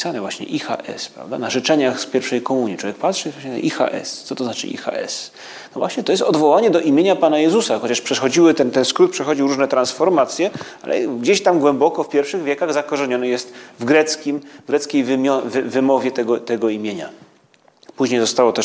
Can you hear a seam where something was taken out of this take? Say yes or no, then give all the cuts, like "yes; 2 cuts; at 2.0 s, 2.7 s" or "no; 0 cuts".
no; 0 cuts